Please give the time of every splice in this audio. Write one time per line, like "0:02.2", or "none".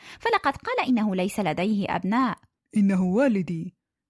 0:02.6